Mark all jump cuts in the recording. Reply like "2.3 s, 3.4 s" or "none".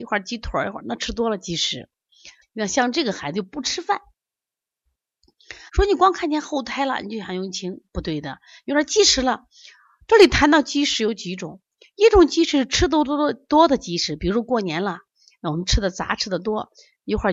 2.4 s, 5.7 s